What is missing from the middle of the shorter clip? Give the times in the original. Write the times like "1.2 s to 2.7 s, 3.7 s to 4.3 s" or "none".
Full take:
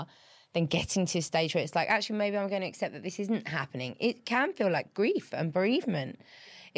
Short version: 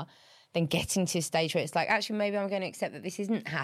none